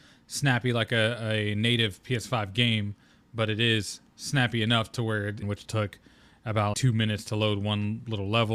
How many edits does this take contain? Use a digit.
2